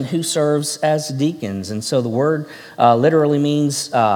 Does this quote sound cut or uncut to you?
uncut